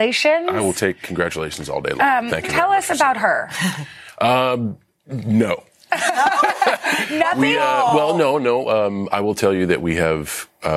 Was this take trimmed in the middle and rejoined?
no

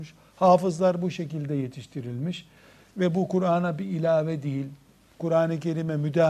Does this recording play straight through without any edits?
yes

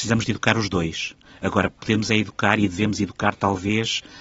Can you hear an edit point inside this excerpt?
no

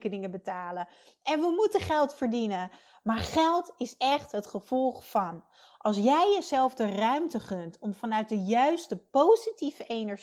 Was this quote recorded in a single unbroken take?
yes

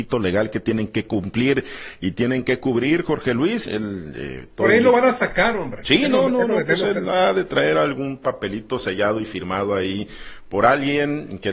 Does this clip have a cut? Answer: yes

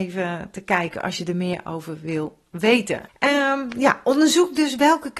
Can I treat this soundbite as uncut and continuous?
no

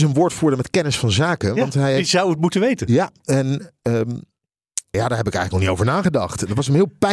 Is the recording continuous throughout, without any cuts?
no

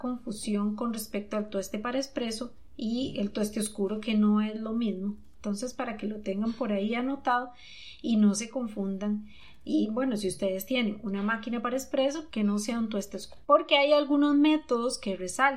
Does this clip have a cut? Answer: yes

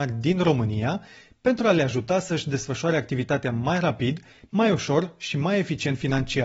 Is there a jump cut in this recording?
no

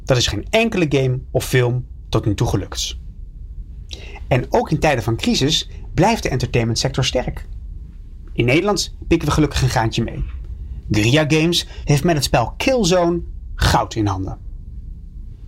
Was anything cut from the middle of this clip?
yes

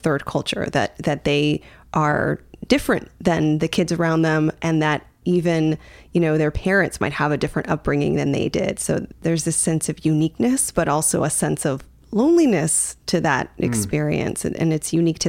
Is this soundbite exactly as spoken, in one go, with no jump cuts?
yes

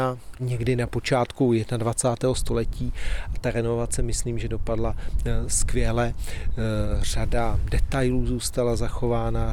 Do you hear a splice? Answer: no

